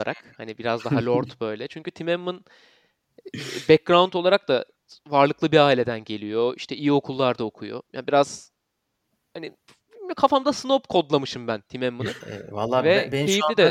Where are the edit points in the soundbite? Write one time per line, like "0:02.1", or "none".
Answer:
0:12.2

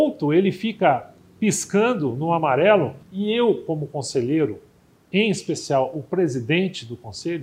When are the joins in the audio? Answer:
0:03.0

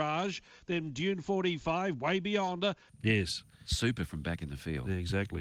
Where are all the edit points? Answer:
0:02.9

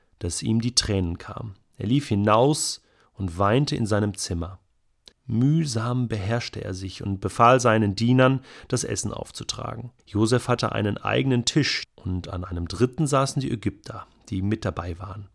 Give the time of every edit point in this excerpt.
0:05.1
0:10.0
0:11.8

